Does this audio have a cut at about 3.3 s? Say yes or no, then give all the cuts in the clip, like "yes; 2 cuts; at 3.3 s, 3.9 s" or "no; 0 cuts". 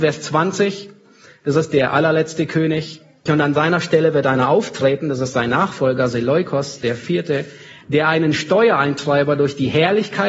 yes; 1 cut; at 3.3 s